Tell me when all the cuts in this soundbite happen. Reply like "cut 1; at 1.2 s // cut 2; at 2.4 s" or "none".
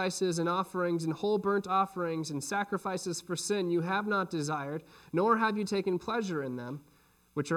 none